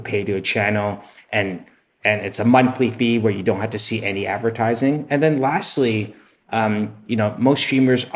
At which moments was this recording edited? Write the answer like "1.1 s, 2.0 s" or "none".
none